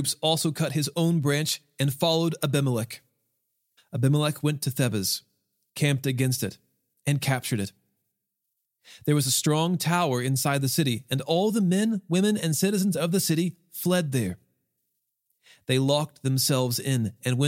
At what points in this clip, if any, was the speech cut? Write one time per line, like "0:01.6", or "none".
0:03.8